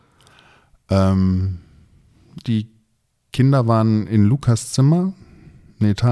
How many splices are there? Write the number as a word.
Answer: one